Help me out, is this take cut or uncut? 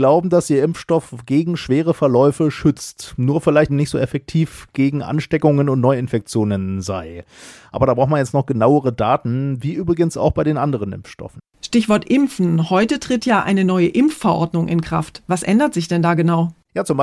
cut